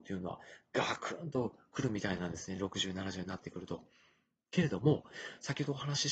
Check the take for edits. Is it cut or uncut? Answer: uncut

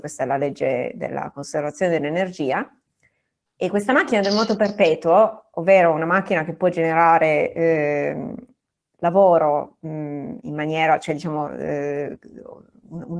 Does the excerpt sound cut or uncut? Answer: uncut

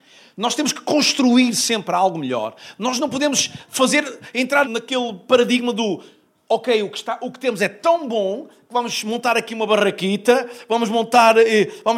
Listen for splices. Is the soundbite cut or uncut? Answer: cut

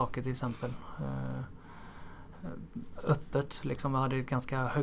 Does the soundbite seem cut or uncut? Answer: uncut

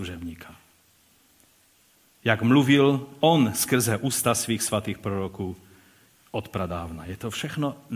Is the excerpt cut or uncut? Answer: uncut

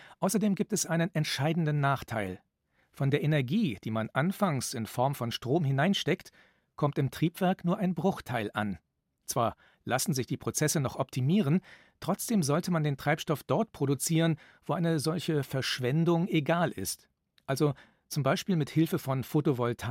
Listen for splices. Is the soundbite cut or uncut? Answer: uncut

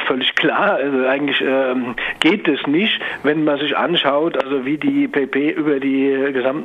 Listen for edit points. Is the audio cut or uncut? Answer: uncut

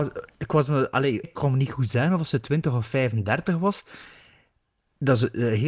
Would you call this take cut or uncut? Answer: cut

